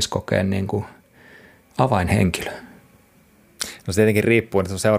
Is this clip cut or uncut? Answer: uncut